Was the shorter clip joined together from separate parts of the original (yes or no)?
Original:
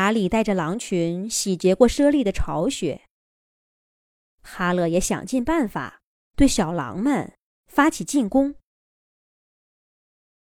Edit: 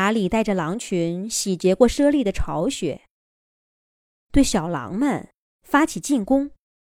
yes